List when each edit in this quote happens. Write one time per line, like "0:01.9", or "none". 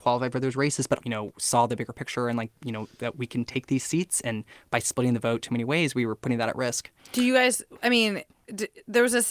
0:01.0
0:07.0